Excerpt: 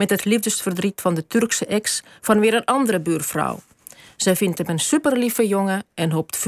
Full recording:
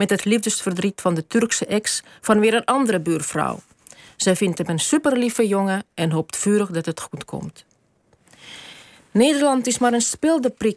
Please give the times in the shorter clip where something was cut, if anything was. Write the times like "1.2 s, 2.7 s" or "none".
none

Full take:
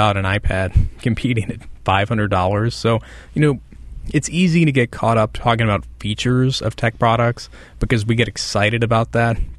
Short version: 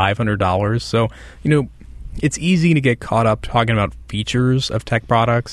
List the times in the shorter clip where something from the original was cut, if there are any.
none

